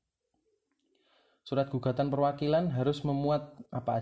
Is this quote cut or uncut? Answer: uncut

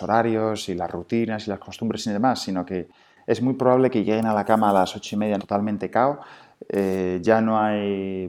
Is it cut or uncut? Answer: cut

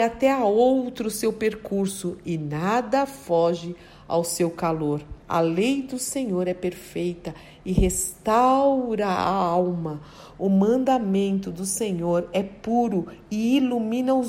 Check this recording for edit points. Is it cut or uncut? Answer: cut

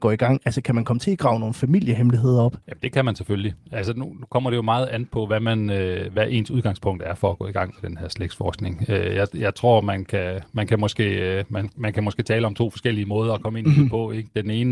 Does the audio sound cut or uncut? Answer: cut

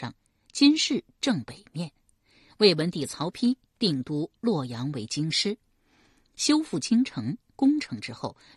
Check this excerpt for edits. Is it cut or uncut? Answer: uncut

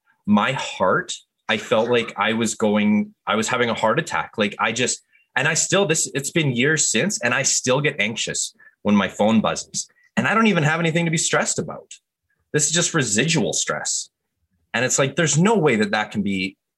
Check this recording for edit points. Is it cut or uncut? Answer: uncut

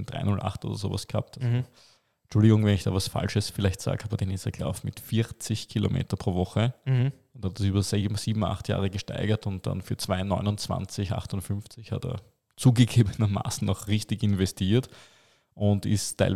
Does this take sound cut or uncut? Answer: uncut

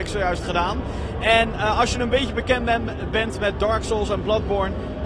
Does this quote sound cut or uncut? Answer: uncut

